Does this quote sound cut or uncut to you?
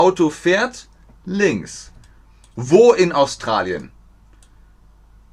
cut